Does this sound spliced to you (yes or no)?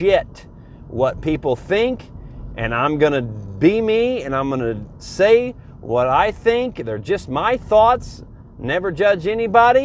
no